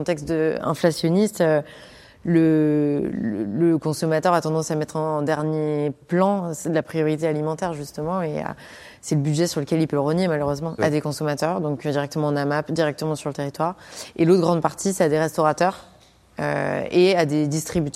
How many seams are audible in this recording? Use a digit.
1